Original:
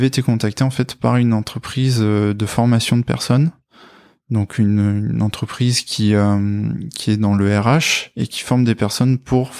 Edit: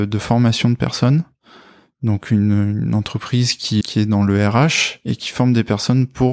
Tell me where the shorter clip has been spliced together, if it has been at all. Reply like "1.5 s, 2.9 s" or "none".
3.8 s